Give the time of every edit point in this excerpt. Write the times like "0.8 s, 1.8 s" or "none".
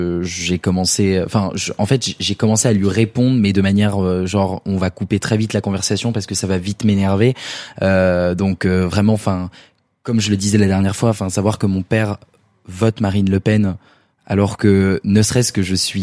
none